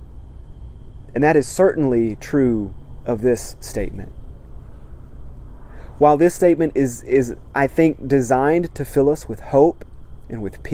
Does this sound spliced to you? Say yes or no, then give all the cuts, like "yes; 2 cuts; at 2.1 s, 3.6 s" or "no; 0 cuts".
no; 0 cuts